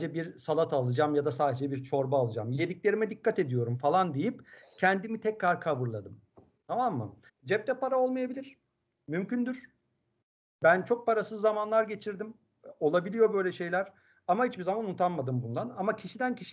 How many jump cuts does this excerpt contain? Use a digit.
1